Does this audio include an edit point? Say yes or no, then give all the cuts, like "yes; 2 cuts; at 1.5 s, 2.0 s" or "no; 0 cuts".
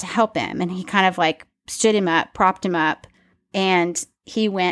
no; 0 cuts